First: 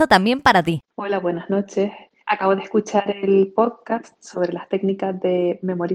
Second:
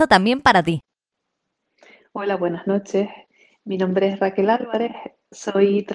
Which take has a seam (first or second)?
first